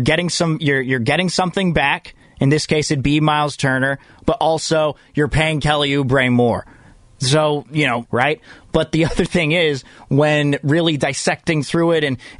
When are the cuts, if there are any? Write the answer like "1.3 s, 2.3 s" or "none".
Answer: 8.0 s